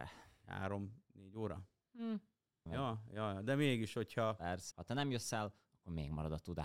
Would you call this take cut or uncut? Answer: cut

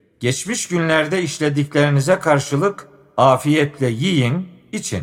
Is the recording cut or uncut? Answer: uncut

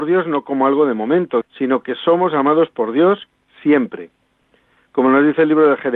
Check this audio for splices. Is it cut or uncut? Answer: cut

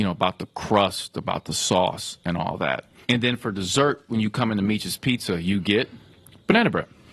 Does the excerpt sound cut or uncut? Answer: cut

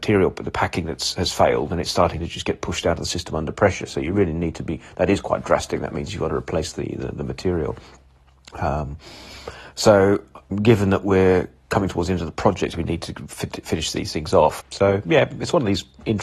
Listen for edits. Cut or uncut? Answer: cut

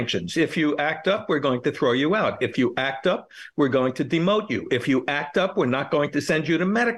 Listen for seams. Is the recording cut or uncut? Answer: uncut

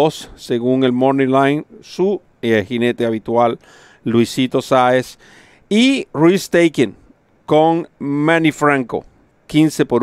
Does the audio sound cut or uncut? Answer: cut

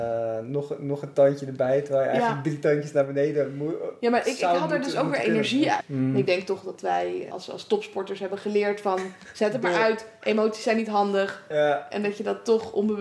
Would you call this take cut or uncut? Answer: cut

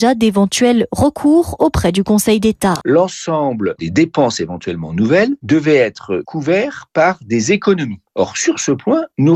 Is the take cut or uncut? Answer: cut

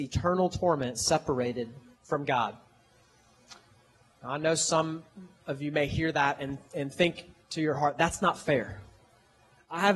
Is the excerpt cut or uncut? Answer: uncut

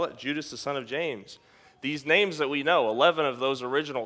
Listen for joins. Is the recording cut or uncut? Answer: uncut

